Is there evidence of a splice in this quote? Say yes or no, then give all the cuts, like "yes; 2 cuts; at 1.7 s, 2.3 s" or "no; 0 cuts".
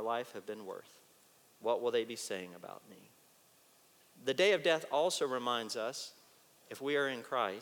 no; 0 cuts